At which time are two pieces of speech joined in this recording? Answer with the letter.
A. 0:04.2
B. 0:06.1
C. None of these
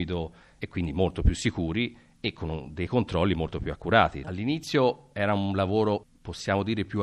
A